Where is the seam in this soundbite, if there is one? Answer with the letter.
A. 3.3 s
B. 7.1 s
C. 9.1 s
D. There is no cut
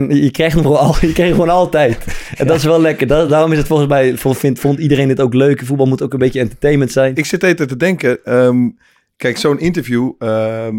D